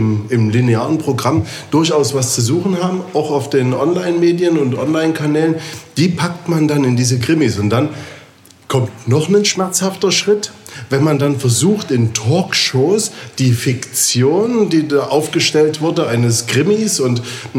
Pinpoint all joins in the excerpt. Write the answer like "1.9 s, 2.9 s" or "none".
none